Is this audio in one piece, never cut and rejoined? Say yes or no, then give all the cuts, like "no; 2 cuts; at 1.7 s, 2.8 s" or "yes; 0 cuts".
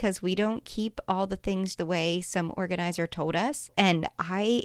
no; 2 cuts; at 1.8 s, 3.7 s